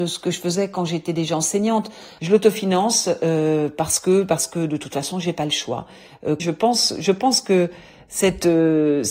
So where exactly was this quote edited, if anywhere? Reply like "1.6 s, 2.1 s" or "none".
2.2 s, 6.4 s